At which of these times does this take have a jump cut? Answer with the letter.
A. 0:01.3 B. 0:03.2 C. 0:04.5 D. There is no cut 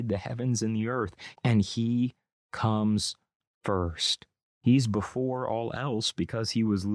A